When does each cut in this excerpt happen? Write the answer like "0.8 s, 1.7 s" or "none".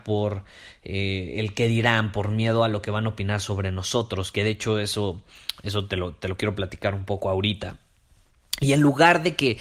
none